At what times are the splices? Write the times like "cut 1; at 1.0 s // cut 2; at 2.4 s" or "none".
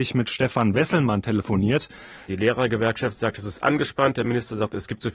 cut 1; at 2.3 s

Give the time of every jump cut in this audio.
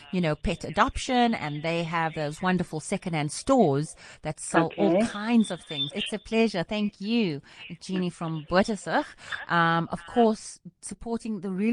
cut 1; at 5.9 s

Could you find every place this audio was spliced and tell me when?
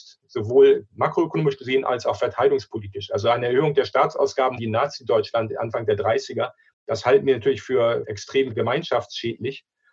cut 1; at 4.6 s

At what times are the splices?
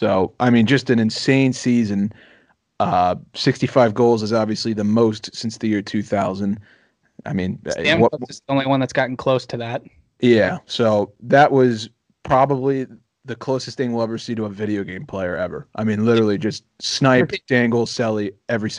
none

